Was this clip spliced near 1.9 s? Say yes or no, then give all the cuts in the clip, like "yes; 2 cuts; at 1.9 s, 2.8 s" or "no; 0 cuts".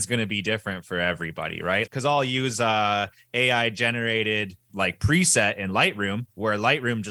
yes; 2 cuts; at 1.9 s, 4.7 s